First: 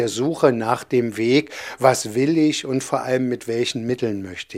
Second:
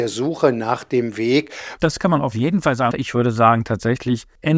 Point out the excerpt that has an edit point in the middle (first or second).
second